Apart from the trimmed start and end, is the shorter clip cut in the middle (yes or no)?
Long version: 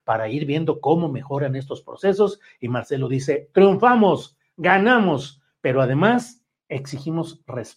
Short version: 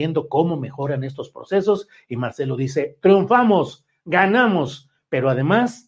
no